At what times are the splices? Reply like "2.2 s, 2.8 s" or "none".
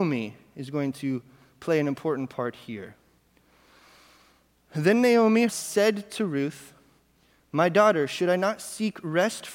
5.5 s